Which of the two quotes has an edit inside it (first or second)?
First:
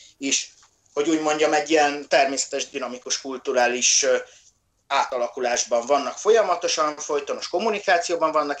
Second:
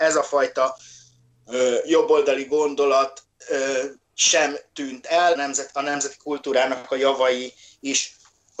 second